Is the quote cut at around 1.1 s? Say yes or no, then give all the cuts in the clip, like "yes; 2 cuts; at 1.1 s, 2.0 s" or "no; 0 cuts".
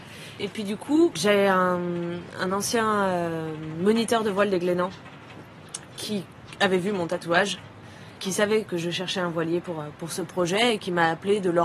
yes; 2 cuts; at 1.1 s, 8.7 s